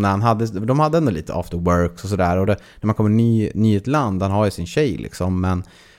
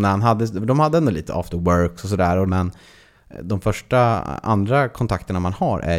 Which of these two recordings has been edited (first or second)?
second